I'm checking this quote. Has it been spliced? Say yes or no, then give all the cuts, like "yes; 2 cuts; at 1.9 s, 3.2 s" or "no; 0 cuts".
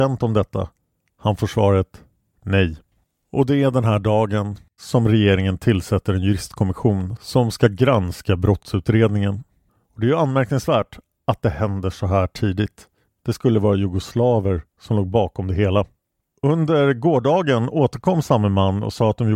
yes; 2 cuts; at 4.8 s, 13.2 s